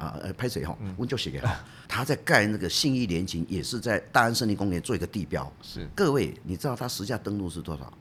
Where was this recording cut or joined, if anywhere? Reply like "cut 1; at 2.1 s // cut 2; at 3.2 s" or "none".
cut 1; at 1.9 s